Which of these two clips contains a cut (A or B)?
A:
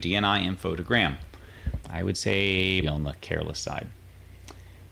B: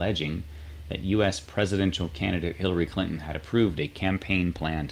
A